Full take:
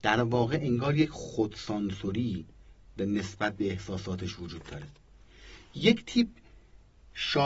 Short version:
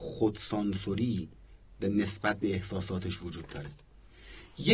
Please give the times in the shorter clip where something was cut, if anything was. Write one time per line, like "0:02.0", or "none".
none